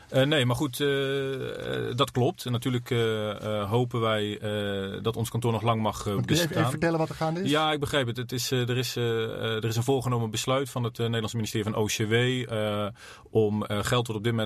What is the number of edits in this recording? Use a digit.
0